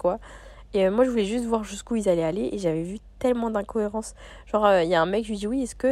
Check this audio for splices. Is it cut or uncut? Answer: uncut